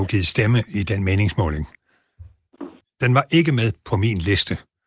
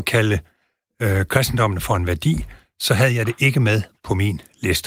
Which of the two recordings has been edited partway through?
first; 1 cut; at 2.8 s

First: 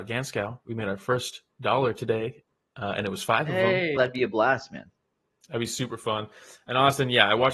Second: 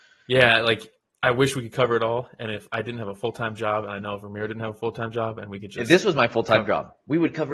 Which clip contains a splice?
first; 1 cut; at 4.0 s

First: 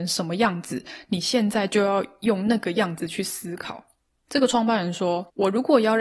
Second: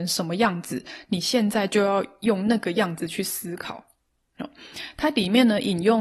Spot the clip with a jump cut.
first; 1 cut; at 4.3 s

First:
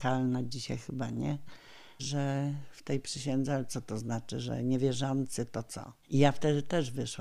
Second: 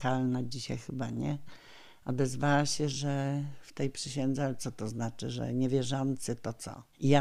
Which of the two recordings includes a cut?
first; 1 cut; at 2.0 s

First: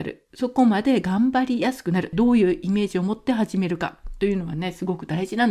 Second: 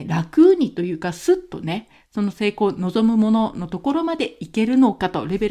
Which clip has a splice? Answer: first; 1 cut; at 2.1 s

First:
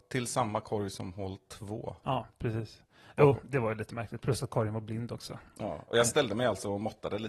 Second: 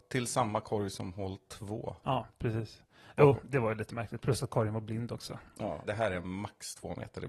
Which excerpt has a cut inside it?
second; 1 cut; at 5.8 s

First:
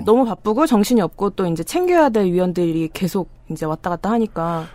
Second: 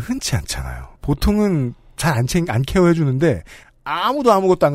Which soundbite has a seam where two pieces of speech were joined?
second; 1 cut; at 1.0 s

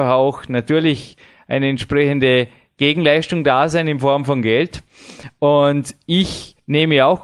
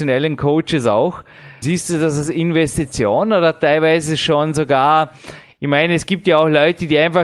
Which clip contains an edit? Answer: second; 1 cut; at 1.6 s

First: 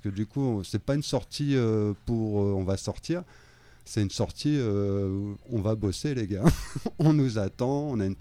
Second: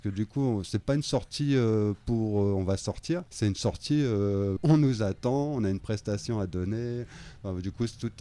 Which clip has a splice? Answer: second; 2 cuts; at 3.3 s, 4.6 s

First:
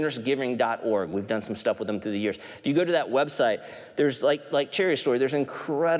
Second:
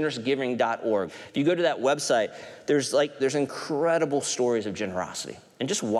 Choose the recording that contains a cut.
second; 2 cuts; at 1.1 s, 3.2 s

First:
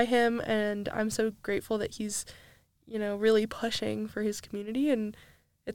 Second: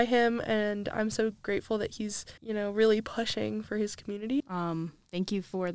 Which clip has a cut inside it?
second; 2 cuts; at 2.4 s, 4.4 s

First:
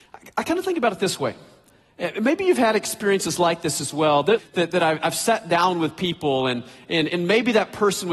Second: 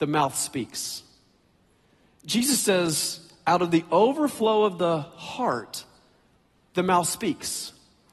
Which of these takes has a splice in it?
first; 1 cut; at 4.4 s

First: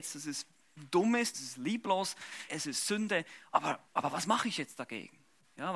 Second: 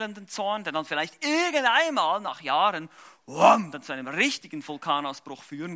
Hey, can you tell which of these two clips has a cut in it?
first; 3 cuts; at 1.3 s, 2.5 s, 3.9 s

